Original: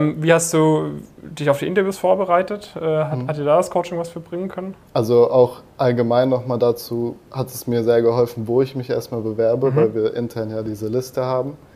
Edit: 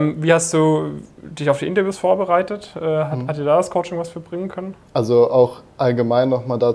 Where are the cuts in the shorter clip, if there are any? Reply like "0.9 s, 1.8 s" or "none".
none